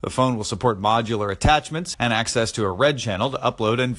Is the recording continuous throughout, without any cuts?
no; 1 cut; at 1.9 s

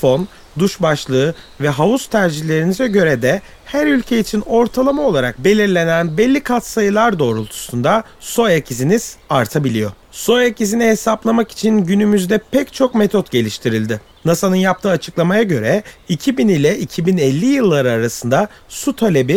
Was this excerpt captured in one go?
no; 2 cuts; at 10.0 s, 14.1 s

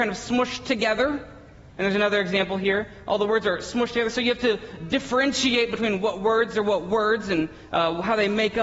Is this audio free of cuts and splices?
yes; 0 cuts

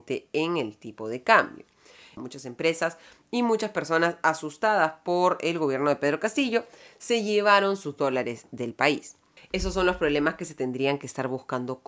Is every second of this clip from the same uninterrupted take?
no; 2 cuts; at 2.2 s, 9.4 s

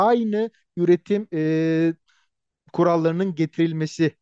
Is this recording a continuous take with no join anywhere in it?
yes; 0 cuts

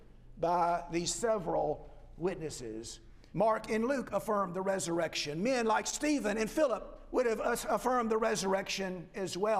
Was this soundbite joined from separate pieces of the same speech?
yes; 1 cut; at 3.3 s

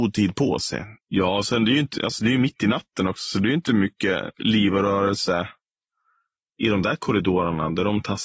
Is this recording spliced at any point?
yes; 1 cut; at 0.9 s

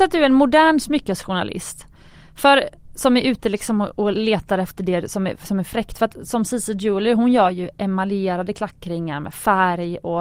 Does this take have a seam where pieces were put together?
no; 0 cuts

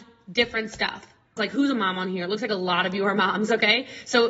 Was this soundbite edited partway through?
yes; 1 cut; at 1.4 s

